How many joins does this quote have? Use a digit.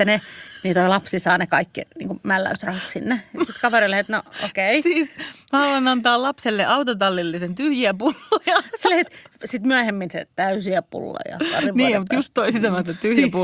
1